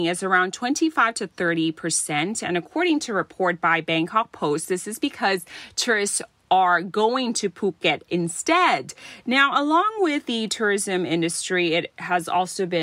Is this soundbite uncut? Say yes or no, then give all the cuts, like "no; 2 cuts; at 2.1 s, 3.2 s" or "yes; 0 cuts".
yes; 0 cuts